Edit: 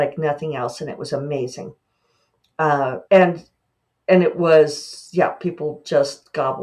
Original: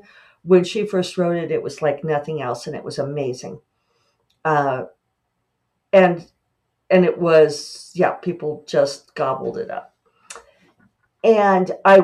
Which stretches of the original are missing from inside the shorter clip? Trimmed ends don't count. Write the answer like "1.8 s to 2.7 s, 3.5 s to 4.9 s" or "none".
4.9 s to 5.9 s